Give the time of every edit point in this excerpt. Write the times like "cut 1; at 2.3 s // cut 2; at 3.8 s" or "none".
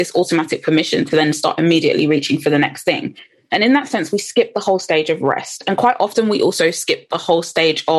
none